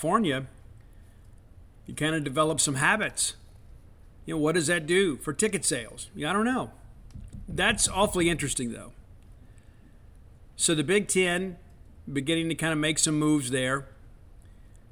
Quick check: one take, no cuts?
yes; 0 cuts

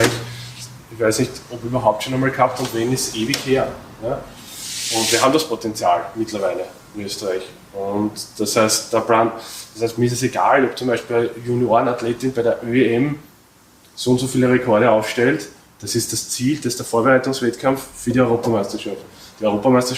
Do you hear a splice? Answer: no; 0 cuts

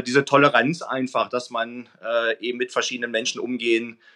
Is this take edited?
no; 0 cuts

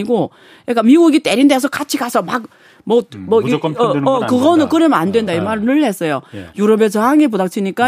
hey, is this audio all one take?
no; 2 cuts; at 5.3 s, 6.5 s

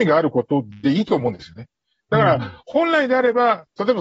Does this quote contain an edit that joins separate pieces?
no; 0 cuts

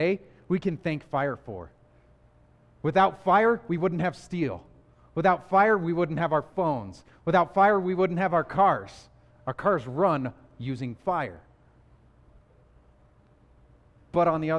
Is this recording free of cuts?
yes; 0 cuts

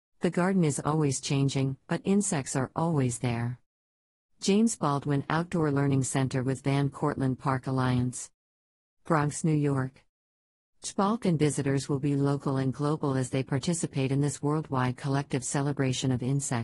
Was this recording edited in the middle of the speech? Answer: no; 0 cuts

